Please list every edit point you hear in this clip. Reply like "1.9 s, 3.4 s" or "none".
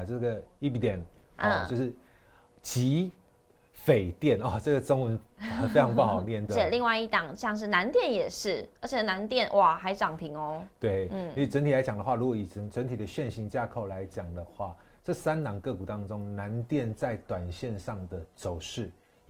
6.5 s